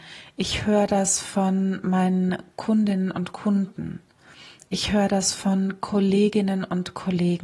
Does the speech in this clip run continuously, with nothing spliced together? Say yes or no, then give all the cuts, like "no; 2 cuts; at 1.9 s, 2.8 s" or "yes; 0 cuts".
yes; 0 cuts